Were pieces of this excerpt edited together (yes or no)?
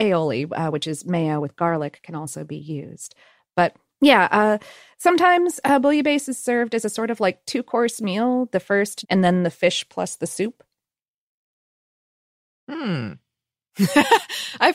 yes